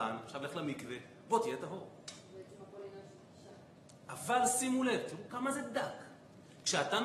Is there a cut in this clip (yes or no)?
yes